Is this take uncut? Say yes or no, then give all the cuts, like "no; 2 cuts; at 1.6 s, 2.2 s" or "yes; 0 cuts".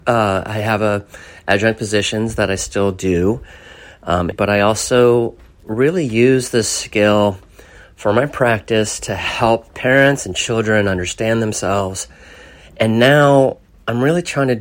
no; 1 cut; at 4.3 s